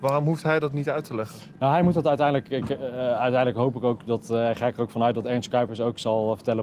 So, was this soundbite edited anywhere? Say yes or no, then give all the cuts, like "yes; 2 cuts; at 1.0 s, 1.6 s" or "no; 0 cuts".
no; 0 cuts